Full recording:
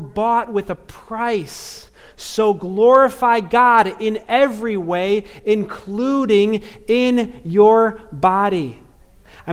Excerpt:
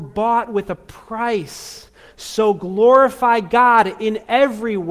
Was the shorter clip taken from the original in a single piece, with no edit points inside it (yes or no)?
yes